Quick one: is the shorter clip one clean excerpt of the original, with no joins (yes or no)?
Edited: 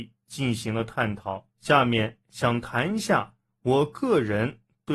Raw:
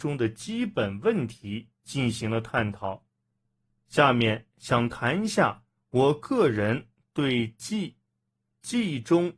no